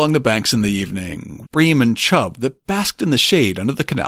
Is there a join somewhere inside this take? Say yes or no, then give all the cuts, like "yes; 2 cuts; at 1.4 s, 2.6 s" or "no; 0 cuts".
yes; 1 cut; at 1.5 s